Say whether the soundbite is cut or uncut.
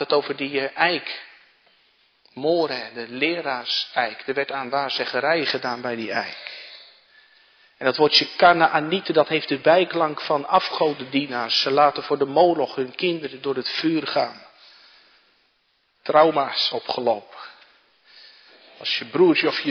uncut